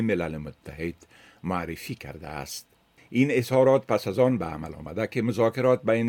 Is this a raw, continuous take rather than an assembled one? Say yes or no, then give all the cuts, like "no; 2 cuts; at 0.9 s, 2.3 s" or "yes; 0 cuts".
no; 1 cut; at 3.0 s